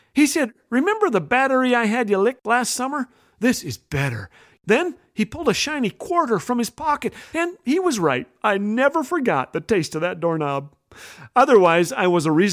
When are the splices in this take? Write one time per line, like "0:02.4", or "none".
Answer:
0:07.3

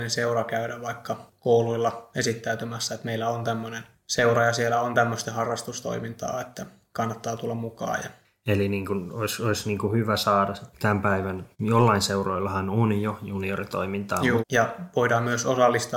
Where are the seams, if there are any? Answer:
0:11.5
0:14.4

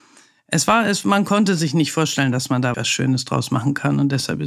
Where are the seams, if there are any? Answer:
0:02.7

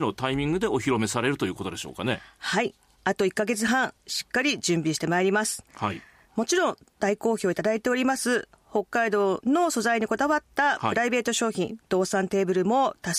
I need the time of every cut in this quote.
none

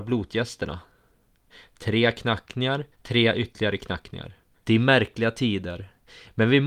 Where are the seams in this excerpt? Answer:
0:02.9
0:04.6

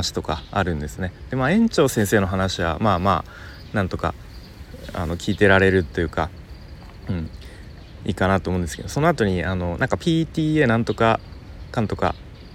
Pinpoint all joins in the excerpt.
0:05.2

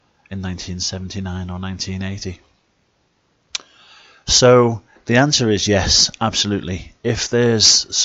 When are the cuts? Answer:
none

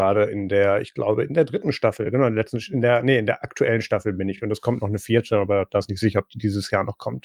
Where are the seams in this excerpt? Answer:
none

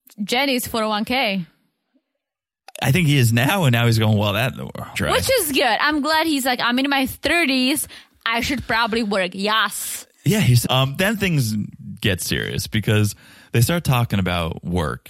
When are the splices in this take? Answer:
0:04.9
0:10.6

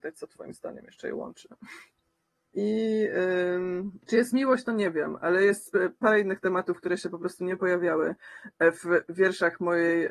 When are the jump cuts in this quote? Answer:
0:02.5
0:04.0

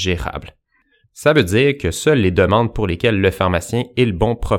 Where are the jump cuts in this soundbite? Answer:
0:01.0

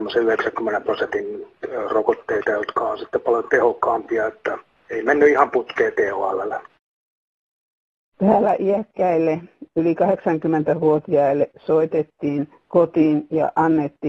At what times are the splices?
none

